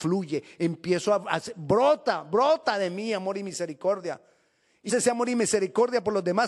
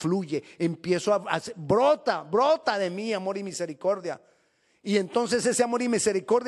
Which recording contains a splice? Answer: first; 1 cut; at 4.9 s

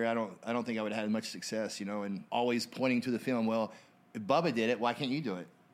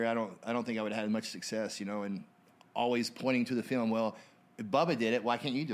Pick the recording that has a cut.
first; 1 cut; at 2.3 s

